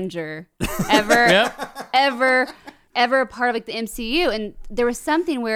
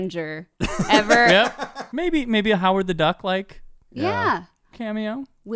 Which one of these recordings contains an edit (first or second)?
second